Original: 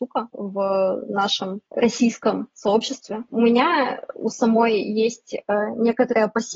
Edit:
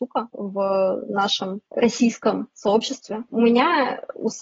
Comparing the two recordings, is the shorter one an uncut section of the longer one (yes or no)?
yes